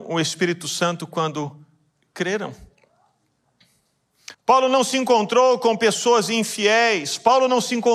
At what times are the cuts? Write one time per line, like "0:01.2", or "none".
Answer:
0:04.3